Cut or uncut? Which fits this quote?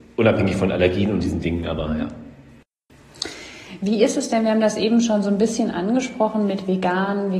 uncut